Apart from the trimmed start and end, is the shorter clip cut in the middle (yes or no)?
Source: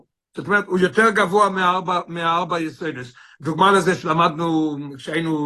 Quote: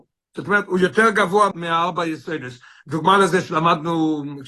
yes